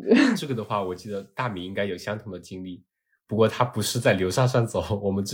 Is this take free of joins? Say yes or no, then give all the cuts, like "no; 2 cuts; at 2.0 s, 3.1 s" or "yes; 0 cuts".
yes; 0 cuts